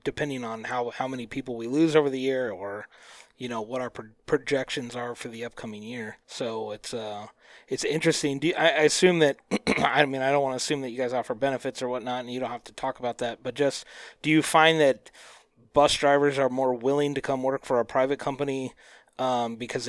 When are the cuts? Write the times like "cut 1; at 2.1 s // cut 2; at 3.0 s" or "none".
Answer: cut 1; at 6.2 s

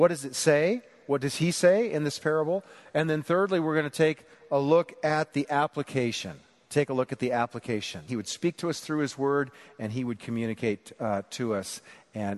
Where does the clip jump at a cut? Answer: cut 1; at 8.1 s

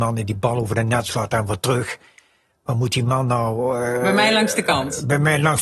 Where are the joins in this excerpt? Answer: none

